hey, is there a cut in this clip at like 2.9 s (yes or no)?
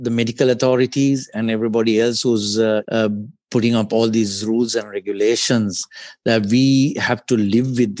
yes